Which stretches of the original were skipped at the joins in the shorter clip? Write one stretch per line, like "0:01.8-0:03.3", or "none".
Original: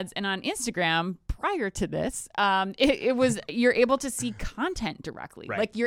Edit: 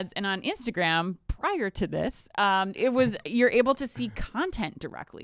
0:02.7-0:03.0